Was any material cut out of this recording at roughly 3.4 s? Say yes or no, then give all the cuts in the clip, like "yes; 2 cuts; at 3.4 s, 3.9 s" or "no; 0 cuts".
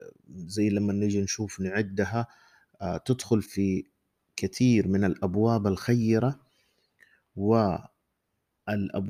yes; 1 cut; at 3.4 s